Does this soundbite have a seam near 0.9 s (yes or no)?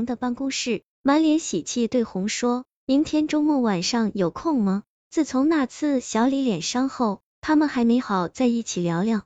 no